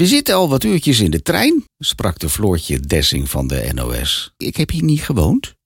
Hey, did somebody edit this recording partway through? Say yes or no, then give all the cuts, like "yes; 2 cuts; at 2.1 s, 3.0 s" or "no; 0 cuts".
yes; 2 cuts; at 1.7 s, 4.4 s